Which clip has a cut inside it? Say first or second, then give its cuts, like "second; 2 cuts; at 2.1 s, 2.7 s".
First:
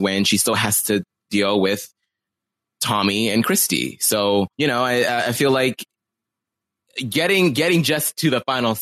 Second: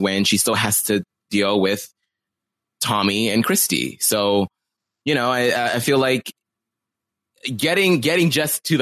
first; 1 cut; at 4.5 s